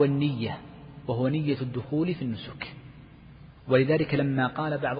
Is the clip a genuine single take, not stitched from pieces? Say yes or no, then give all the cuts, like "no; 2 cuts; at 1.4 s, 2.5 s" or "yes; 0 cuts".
no; 1 cut; at 3.6 s